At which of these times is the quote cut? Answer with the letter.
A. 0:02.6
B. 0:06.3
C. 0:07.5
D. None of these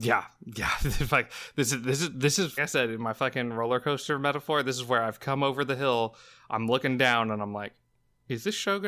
A